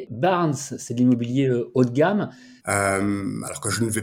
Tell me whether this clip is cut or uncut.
cut